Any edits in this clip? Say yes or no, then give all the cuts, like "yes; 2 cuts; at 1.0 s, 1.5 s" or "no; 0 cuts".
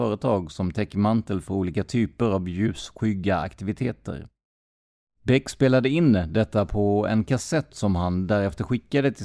yes; 1 cut; at 5.1 s